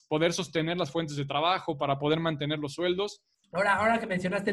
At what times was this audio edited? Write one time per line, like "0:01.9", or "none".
0:03.4